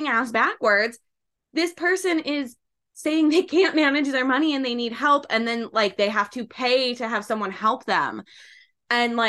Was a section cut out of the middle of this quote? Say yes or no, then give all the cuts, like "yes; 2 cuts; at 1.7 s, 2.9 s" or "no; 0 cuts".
no; 0 cuts